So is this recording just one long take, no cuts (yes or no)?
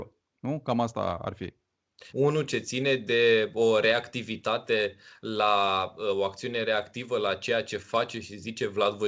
no